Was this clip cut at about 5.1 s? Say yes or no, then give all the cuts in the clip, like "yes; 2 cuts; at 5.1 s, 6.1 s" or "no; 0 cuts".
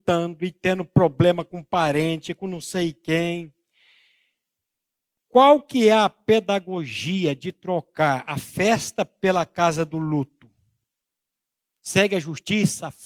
no; 1 cut; at 11.7 s